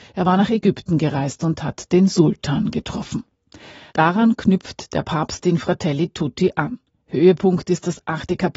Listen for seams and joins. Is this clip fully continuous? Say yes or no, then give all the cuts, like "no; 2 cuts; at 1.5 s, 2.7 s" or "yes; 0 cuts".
yes; 0 cuts